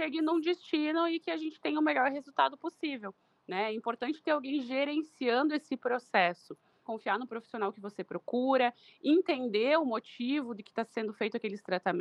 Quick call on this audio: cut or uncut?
cut